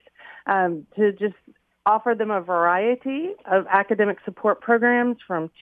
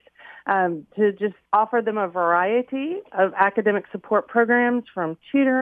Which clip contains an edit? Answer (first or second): second